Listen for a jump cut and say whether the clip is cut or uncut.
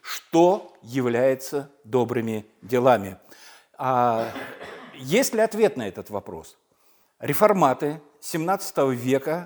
cut